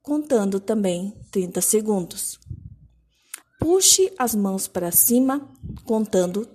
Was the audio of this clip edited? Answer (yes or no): yes